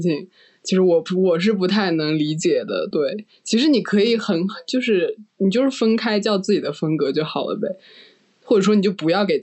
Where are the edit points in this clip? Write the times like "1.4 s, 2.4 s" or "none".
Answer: none